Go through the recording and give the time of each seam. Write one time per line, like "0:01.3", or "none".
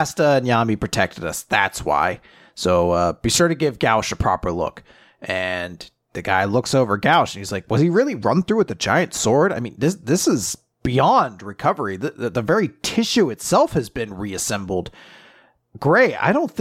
none